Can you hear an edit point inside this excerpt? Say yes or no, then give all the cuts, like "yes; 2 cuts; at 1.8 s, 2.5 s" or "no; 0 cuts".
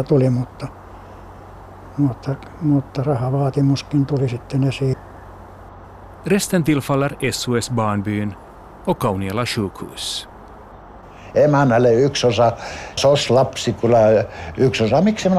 yes; 2 cuts; at 6.1 s, 13.0 s